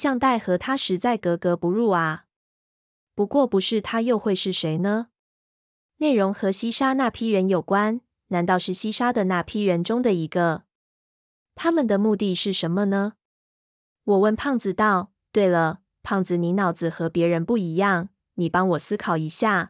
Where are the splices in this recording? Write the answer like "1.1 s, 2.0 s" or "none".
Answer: none